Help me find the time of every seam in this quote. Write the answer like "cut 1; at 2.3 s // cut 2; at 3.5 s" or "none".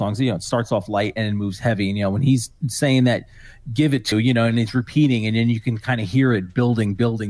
cut 1; at 4.1 s